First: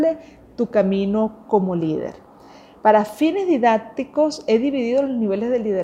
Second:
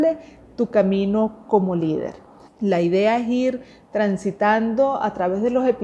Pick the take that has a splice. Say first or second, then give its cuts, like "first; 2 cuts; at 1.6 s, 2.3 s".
second; 1 cut; at 2.5 s